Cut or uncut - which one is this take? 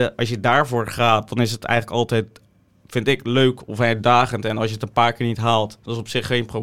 uncut